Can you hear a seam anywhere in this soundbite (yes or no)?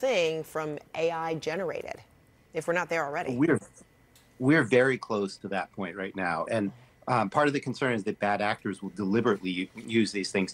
no